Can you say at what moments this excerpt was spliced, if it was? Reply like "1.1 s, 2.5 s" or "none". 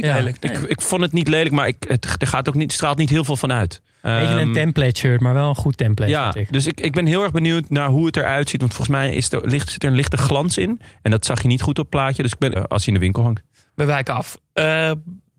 3.9 s, 12.6 s